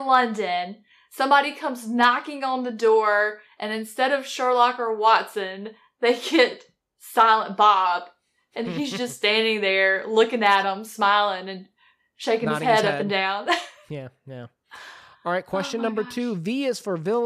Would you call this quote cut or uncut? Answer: uncut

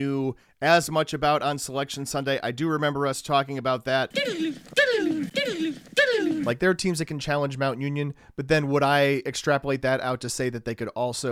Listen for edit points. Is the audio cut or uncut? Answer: uncut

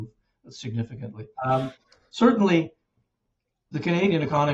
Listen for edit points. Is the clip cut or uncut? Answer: cut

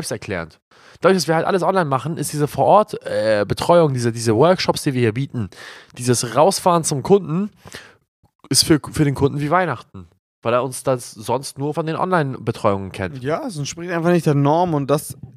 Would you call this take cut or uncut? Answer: cut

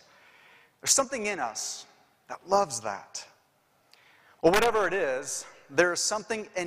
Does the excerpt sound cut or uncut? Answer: uncut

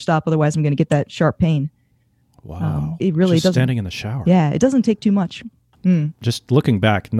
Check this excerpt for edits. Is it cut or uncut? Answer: cut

